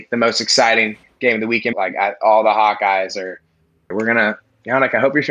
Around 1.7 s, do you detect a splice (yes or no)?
yes